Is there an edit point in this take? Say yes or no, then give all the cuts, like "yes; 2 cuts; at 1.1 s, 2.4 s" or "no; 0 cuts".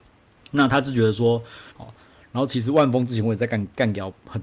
yes; 1 cut; at 1.7 s